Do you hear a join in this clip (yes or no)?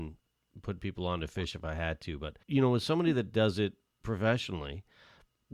yes